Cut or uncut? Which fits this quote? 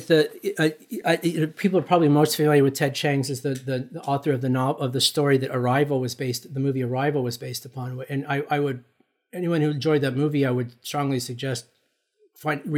uncut